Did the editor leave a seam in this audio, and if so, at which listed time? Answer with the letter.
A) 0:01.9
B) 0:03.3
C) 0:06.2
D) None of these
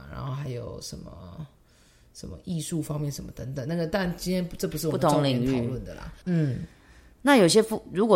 C